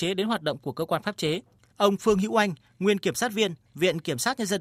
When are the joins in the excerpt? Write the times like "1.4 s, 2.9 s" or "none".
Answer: 1.7 s